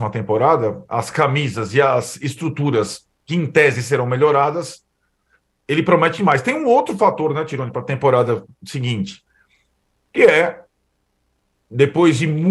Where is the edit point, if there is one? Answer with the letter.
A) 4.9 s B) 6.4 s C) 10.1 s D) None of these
D